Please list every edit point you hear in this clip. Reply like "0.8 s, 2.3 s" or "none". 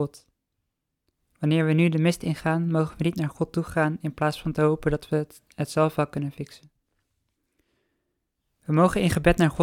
none